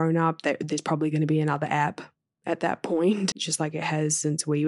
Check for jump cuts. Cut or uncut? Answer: cut